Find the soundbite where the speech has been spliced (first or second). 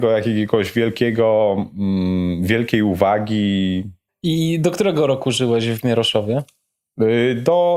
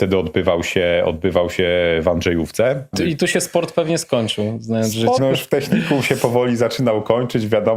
second